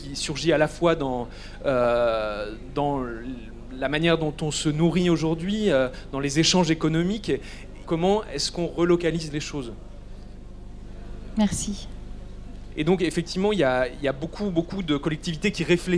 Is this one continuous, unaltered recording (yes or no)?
no